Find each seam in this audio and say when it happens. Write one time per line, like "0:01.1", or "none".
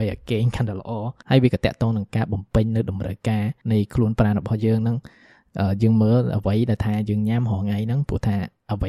0:03.6